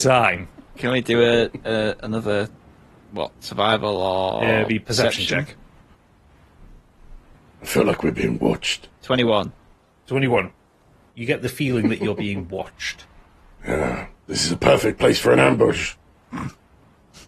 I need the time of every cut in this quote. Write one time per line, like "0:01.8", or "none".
0:11.1
0:13.6